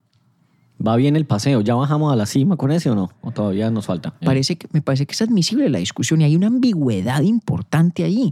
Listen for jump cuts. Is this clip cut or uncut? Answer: cut